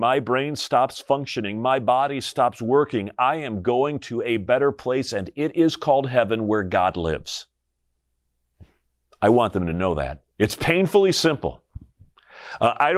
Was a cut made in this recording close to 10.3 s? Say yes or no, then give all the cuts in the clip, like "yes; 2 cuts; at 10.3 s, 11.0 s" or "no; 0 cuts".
yes; 1 cut; at 10.3 s